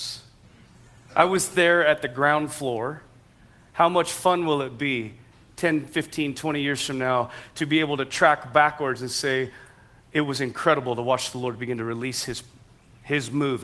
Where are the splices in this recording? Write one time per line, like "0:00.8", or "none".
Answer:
none